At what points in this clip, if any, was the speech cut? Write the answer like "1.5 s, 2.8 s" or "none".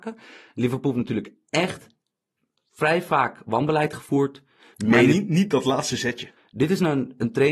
4.7 s, 6.4 s